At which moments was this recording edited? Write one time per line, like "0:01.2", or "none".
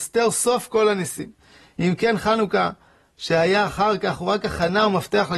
none